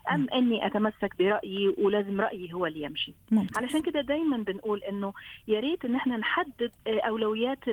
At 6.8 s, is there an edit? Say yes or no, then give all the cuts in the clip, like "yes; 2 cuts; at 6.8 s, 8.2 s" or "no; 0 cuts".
yes; 1 cut; at 6.8 s